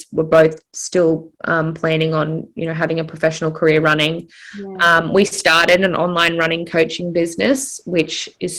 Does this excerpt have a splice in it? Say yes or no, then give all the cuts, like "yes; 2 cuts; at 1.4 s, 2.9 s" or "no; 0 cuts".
no; 0 cuts